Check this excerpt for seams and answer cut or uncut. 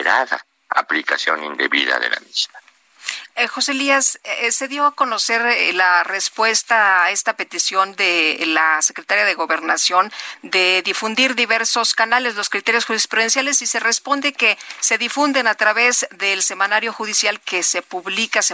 uncut